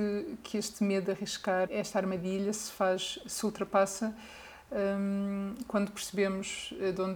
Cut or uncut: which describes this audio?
cut